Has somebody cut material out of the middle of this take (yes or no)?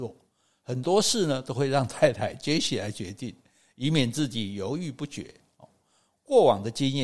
no